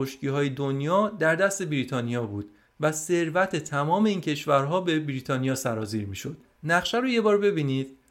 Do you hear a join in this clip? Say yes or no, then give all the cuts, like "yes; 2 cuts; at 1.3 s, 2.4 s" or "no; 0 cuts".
no; 0 cuts